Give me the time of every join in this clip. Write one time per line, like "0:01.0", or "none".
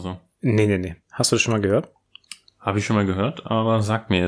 0:01.0